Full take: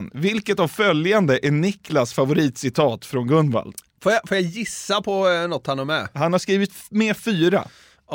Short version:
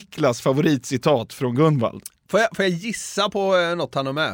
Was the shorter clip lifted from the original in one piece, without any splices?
yes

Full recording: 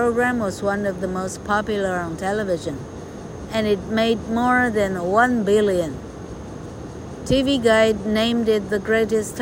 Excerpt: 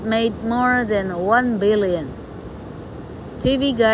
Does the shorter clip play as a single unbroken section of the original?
yes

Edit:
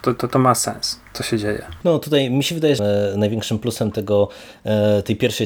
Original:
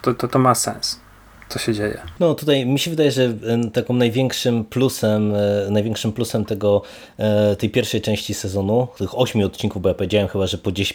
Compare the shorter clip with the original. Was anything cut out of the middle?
yes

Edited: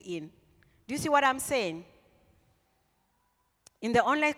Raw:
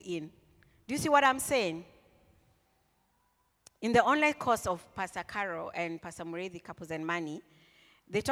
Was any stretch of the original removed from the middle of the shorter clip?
no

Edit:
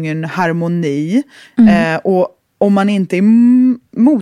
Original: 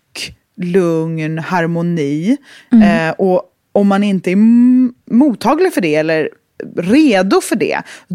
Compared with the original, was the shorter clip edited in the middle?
no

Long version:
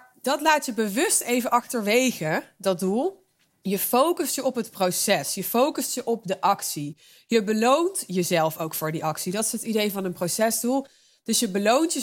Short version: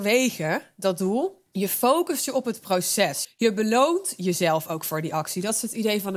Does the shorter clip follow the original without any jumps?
no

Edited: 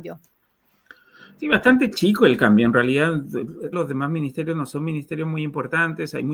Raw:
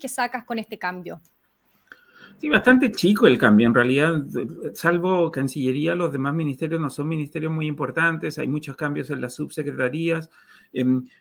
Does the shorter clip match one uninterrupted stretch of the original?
no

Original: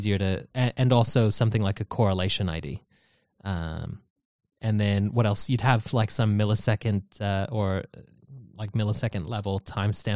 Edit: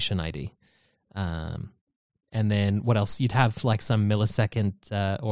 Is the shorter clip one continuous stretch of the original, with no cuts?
yes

